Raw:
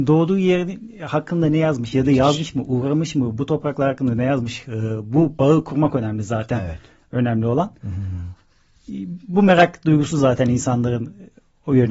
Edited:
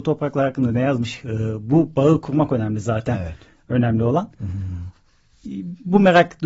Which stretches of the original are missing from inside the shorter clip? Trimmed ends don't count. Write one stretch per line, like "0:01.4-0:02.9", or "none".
none